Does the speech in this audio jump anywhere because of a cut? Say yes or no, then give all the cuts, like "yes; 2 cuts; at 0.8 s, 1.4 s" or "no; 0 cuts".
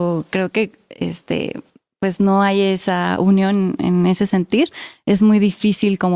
no; 0 cuts